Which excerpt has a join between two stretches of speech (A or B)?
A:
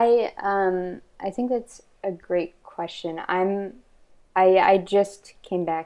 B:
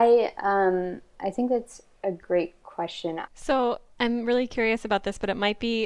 B